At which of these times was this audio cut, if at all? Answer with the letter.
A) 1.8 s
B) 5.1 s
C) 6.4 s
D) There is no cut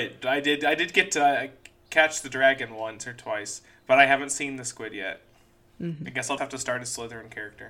C